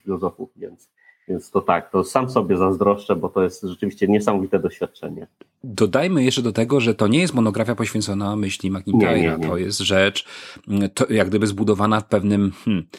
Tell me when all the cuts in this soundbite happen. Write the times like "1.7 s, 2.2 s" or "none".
none